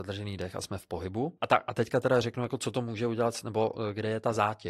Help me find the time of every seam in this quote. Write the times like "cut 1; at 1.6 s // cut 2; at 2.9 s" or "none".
cut 1; at 1.4 s